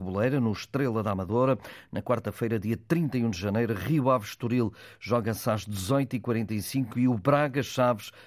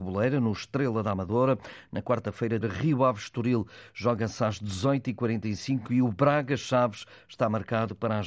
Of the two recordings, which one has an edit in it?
second; 1 cut; at 2.6 s

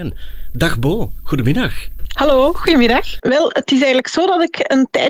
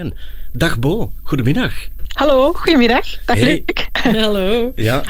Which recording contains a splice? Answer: first; 1 cut; at 3.2 s

